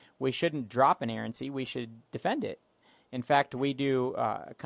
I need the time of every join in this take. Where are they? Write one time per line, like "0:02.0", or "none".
none